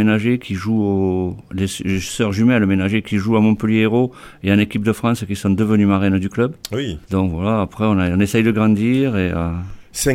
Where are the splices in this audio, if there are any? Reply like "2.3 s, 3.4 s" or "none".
7.0 s